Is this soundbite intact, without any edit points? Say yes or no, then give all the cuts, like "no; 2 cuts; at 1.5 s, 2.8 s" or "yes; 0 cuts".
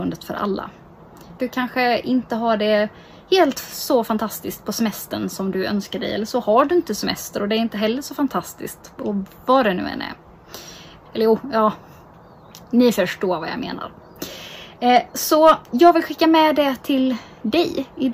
no; 3 cuts; at 1.4 s, 11.1 s, 15.6 s